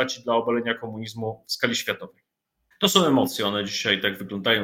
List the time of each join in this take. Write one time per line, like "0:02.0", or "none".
0:02.7